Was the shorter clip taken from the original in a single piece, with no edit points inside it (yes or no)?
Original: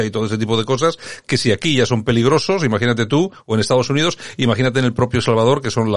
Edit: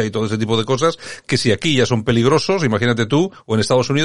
yes